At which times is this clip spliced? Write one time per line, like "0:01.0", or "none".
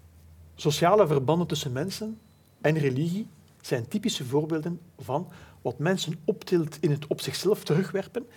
0:03.6